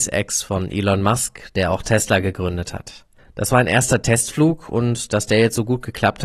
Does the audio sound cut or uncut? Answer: cut